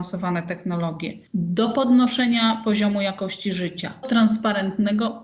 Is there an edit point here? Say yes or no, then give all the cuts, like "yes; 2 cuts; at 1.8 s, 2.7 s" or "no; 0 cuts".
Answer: yes; 2 cuts; at 1.3 s, 4.0 s